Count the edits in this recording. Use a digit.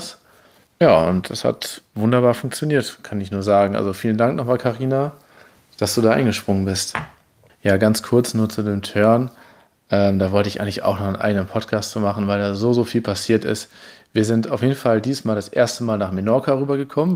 0